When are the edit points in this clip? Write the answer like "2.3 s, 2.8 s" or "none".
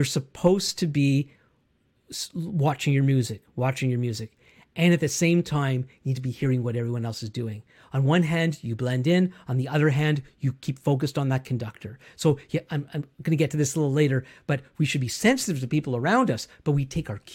none